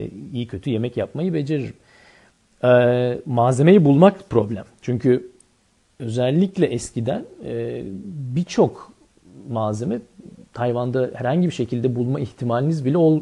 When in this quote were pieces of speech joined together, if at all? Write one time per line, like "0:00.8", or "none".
none

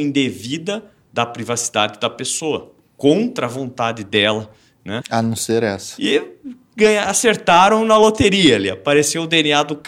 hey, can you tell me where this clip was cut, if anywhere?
0:05.0

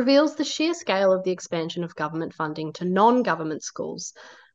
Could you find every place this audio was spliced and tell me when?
none

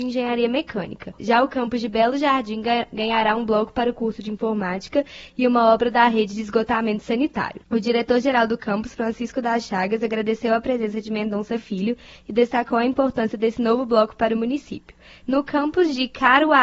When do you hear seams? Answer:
0:01.2
0:07.6
0:15.2

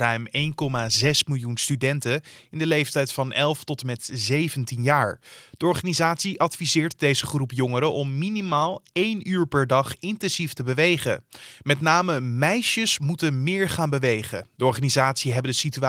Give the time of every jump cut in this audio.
none

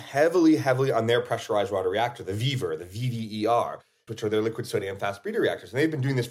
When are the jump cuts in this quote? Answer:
0:04.1

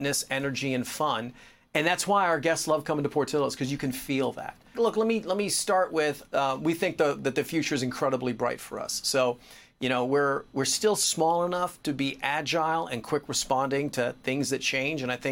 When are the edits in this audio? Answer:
0:04.7

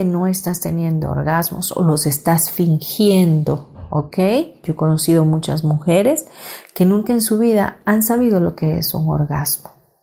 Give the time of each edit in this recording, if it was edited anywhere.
0:04.6

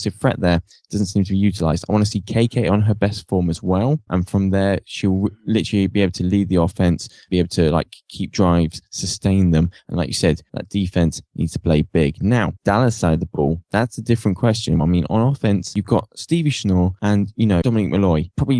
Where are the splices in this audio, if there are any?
0:14.8
0:17.6

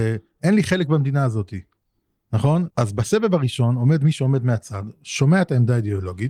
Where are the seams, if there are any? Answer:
0:02.7

